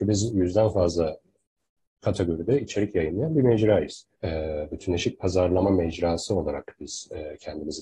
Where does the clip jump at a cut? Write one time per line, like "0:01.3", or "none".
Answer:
0:04.1